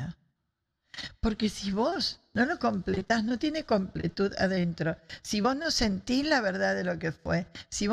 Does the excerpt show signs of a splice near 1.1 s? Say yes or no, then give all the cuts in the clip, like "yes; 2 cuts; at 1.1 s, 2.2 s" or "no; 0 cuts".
no; 0 cuts